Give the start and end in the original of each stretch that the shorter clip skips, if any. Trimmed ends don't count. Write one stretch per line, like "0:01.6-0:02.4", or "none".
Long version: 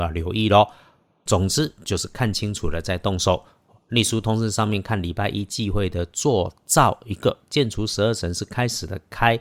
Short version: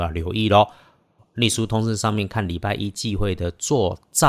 0:01.2-0:03.7